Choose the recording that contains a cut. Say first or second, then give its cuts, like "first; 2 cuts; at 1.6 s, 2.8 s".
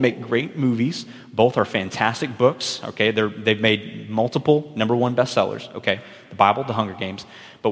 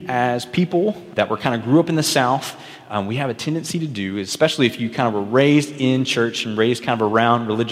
second; 1 cut; at 1.2 s